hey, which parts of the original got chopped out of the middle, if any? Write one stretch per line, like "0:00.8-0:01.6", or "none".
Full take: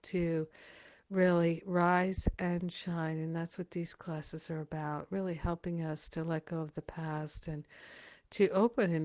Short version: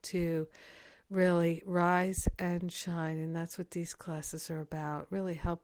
none